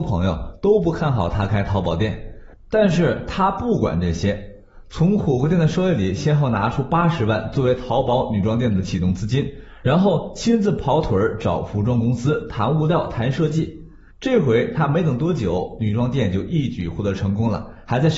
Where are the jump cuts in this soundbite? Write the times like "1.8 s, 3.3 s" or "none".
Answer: none